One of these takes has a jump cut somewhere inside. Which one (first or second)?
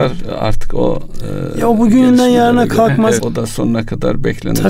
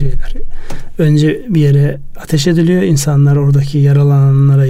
first